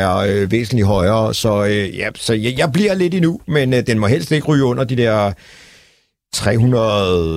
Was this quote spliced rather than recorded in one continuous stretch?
no; 0 cuts

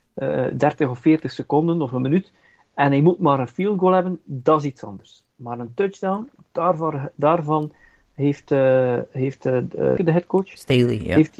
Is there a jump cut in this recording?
yes; 1 cut; at 10.0 s

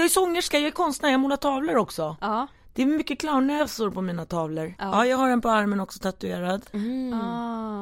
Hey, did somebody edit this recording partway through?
yes; 1 cut; at 4.8 s

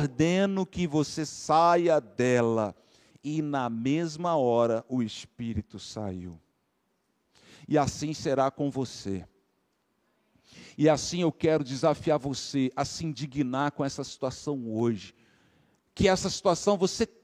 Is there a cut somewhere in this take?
no; 0 cuts

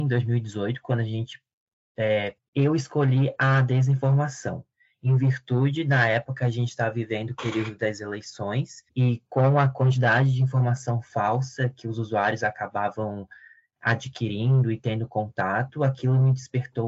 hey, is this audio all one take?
no; 2 cuts; at 2.4 s, 8.9 s

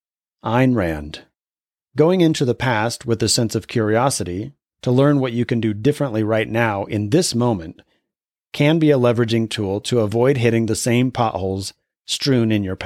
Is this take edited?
yes; 1 cut; at 1.8 s

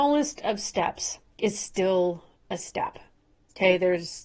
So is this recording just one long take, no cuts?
no; 1 cut; at 1.3 s

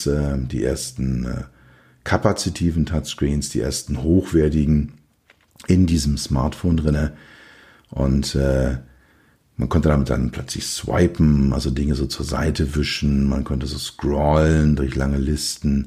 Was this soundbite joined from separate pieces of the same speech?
no; 0 cuts

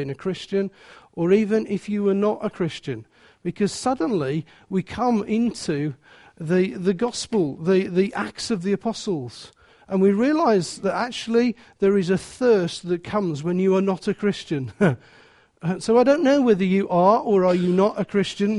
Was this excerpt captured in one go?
yes; 0 cuts

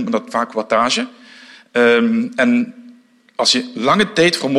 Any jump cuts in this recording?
no; 0 cuts

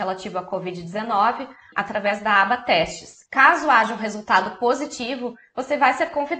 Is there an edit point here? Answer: yes; 2 cuts; at 1.7 s, 3.3 s

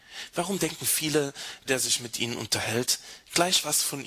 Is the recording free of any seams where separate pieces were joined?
no; 1 cut; at 1.7 s

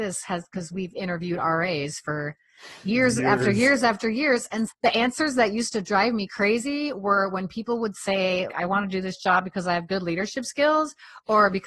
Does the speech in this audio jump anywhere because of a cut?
yes; 2 cuts; at 4.7 s, 8.5 s

